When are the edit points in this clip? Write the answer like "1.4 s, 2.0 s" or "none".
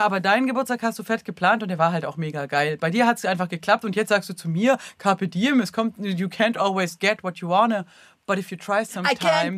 none

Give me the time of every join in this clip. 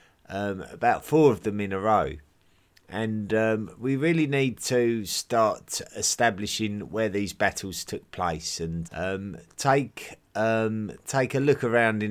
8.8 s

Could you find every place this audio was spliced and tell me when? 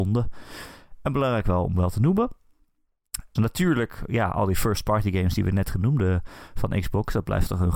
3.4 s

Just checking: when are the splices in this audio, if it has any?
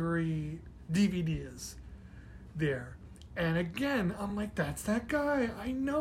none

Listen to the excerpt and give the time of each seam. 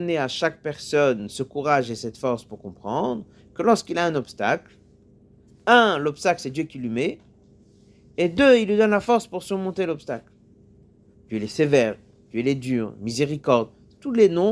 11.1 s

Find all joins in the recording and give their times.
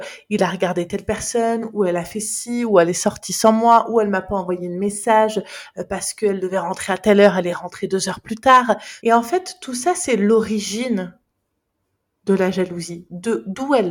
9.0 s

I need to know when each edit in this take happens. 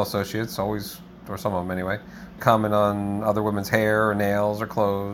2.4 s

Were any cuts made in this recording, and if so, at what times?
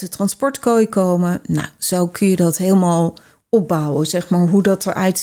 none

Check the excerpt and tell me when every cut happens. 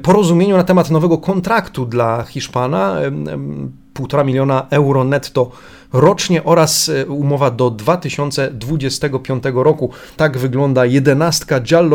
10.2 s

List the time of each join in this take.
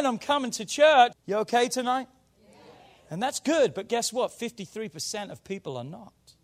1.1 s

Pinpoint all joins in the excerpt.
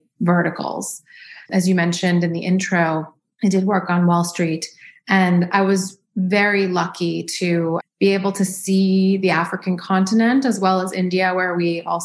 1.4 s, 7.8 s

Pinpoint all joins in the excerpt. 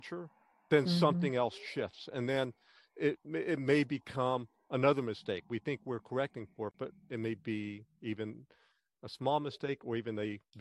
none

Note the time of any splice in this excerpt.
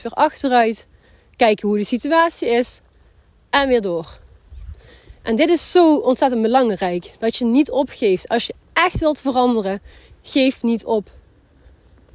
8.6 s

